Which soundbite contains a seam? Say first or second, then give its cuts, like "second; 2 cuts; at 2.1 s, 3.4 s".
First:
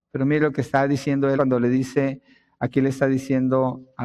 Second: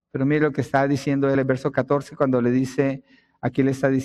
first; 1 cut; at 1.4 s